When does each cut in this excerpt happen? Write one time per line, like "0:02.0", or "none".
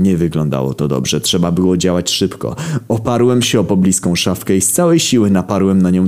none